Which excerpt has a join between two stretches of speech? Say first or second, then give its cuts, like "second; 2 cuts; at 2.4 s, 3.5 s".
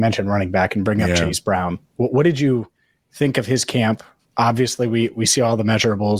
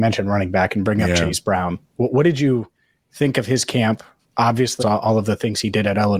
second; 1 cut; at 4.8 s